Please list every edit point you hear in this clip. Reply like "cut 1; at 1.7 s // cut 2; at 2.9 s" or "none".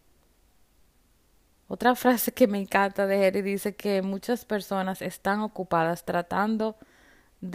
none